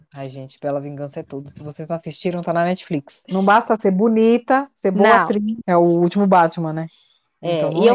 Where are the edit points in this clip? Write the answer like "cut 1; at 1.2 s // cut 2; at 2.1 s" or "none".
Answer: cut 1; at 3.2 s // cut 2; at 5.6 s